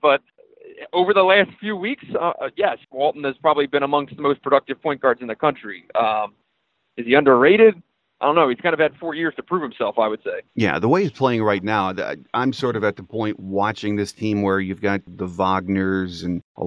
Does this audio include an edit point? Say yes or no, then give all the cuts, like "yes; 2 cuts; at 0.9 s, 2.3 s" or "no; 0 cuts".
yes; 1 cut; at 2.8 s